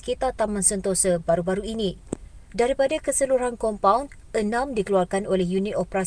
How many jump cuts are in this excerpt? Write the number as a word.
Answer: one